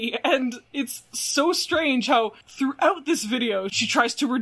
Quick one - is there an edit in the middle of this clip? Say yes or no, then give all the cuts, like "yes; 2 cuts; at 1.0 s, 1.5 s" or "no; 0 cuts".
no; 0 cuts